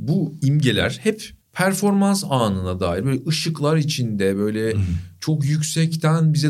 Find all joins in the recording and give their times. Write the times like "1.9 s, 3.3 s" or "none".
1.4 s